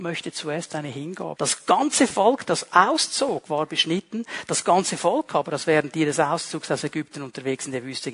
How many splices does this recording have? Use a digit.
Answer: 1